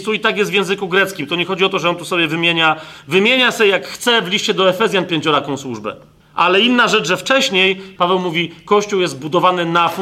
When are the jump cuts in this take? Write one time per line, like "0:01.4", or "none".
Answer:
0:06.2
0:08.0